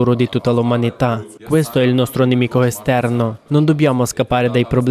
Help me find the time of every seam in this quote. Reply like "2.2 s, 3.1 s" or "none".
1.4 s, 3.5 s

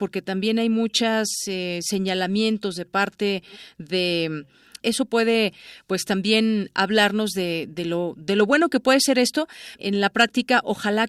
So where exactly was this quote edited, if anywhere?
4.8 s, 9.8 s

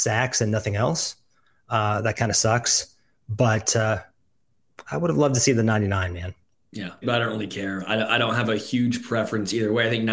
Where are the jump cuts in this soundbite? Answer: 7.0 s

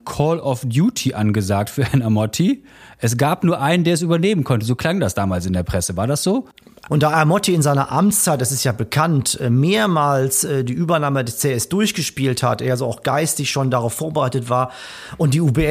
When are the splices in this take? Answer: 6.9 s

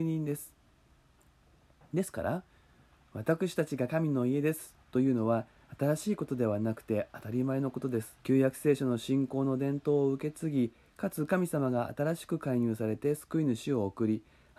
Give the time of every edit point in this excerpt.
8.2 s

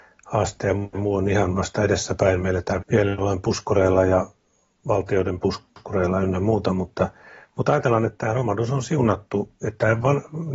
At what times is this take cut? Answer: 2.8 s

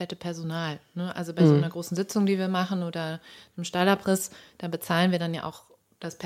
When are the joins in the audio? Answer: none

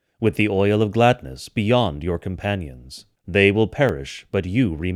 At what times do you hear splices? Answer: 3.2 s

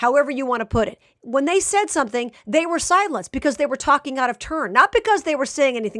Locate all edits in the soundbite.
1.2 s

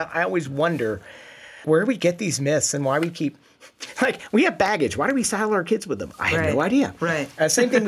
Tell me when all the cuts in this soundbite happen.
1.6 s

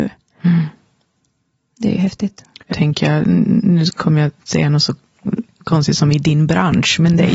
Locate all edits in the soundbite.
2.7 s

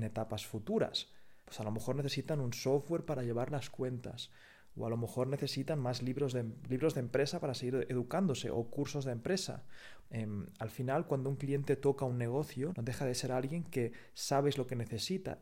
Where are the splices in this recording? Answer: 1.4 s, 10.0 s, 12.7 s

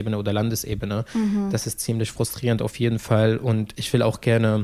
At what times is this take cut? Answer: none

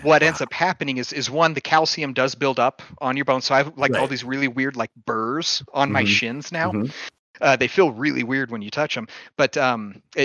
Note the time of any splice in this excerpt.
none

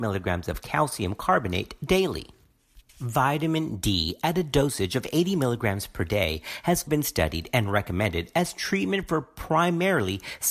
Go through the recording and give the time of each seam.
2.9 s, 6.9 s

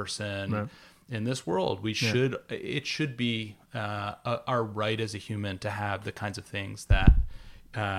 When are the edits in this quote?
none

